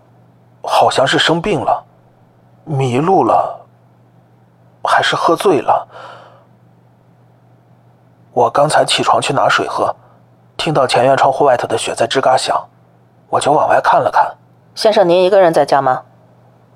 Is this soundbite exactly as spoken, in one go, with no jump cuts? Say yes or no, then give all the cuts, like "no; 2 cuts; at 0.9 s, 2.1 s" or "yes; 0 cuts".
no; 1 cut; at 14.6 s